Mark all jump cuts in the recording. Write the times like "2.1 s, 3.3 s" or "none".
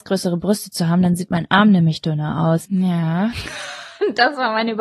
2.7 s